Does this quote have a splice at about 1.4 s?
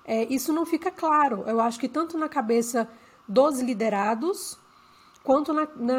no; 0 cuts

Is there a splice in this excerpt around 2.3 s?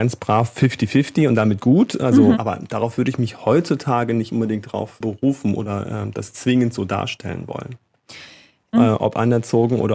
yes; 2 cuts; at 2.3 s, 8.7 s

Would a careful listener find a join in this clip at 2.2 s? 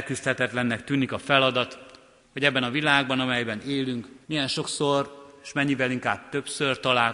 yes; 2 cuts; at 2.2 s, 4.2 s

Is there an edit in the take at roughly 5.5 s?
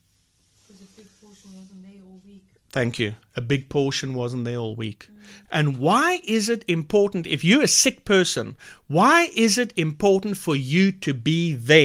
yes; 1 cut; at 5.5 s

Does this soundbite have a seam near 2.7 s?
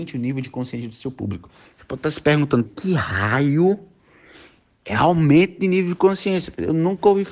yes; 1 cut; at 2.7 s

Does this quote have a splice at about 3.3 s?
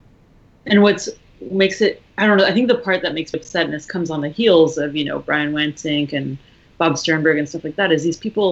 yes; 1 cut; at 3.3 s

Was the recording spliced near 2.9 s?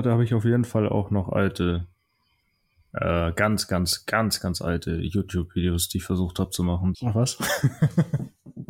no; 1 cut; at 6.9 s

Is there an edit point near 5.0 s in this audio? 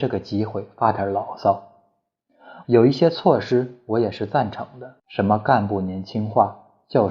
yes; 2 cuts; at 2.6 s, 5.0 s

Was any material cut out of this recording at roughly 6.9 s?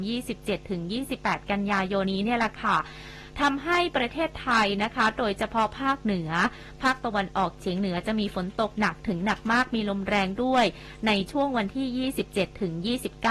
no; 1 cut; at 2.0 s

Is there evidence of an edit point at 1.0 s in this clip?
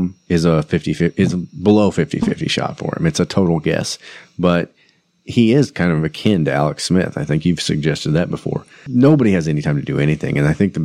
no; 0 cuts

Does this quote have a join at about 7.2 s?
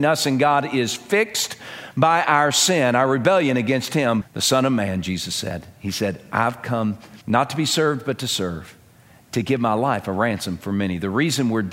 yes; 2 cuts; at 4.2 s, 7.2 s

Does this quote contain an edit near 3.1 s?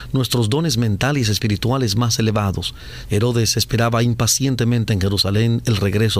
yes; 1 cut; at 3.1 s

